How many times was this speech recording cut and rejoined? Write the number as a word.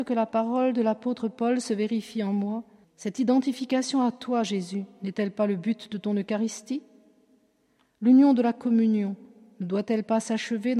one